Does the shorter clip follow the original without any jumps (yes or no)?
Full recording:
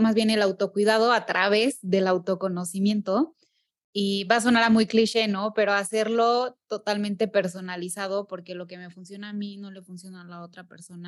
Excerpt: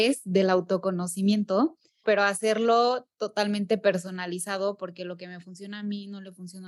no